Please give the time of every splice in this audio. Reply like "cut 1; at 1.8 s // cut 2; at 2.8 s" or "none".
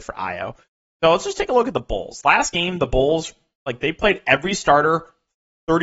none